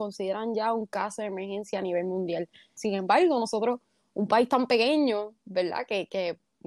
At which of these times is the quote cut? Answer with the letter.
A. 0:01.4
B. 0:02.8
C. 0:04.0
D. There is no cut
B